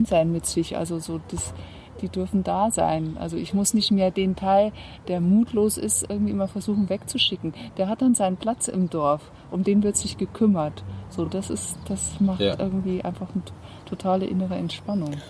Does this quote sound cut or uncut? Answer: uncut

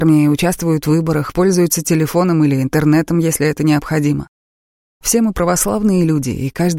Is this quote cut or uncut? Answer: uncut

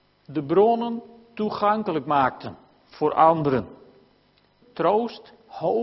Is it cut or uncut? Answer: cut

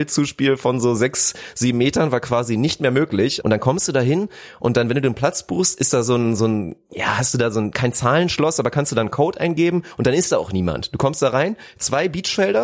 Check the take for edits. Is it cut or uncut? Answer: cut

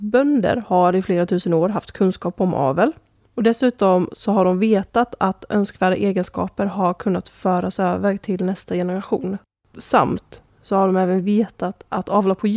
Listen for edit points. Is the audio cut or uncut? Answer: uncut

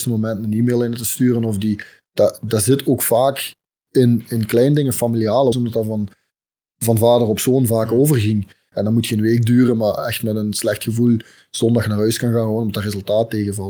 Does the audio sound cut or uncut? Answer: cut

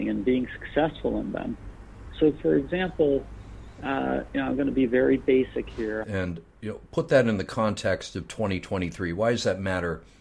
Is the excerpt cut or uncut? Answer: cut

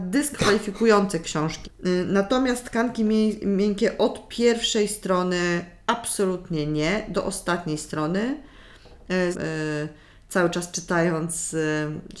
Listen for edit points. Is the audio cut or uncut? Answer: cut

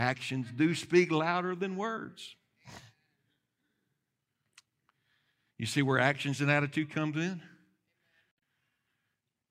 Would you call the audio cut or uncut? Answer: uncut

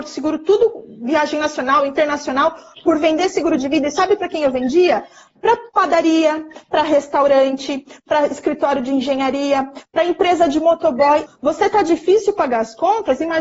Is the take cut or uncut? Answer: cut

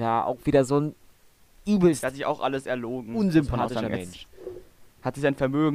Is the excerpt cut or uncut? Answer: uncut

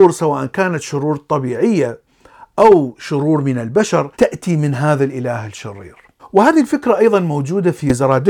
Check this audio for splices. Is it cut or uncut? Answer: cut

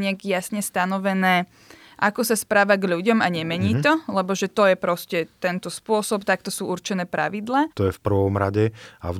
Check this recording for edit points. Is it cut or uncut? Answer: cut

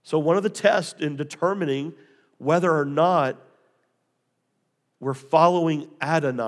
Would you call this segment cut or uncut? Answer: uncut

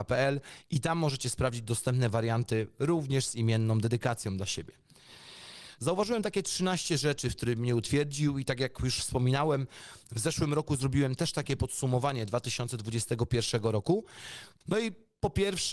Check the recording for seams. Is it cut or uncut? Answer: cut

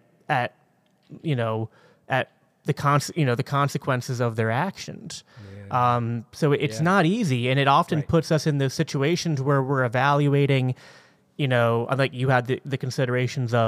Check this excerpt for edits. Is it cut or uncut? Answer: uncut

